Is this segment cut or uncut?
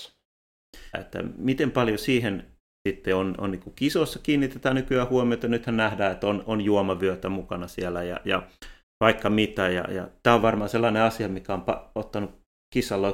cut